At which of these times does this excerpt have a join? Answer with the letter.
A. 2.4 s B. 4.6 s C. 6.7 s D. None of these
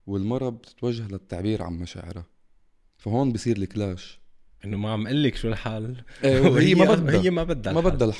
B